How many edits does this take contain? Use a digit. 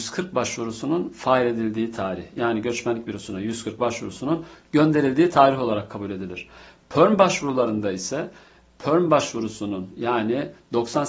0